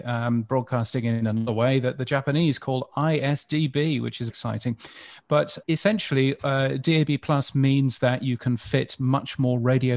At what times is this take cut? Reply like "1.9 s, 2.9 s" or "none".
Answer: 4.3 s, 5.6 s